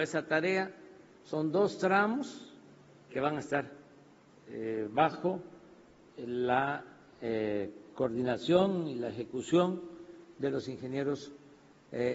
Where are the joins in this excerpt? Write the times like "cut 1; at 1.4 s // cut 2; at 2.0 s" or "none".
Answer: cut 1; at 3.1 s

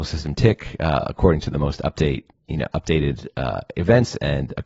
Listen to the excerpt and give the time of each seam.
none

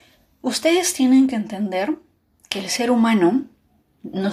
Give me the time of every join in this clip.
none

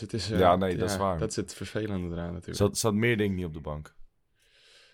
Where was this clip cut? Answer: none

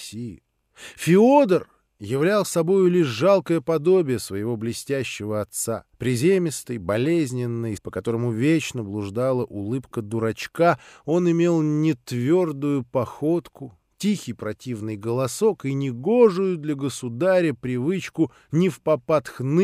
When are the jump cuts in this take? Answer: cut 1; at 5.9 s // cut 2; at 7.8 s

